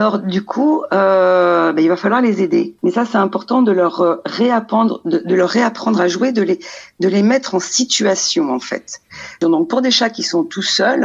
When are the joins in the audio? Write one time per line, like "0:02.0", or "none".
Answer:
0:02.8
0:09.4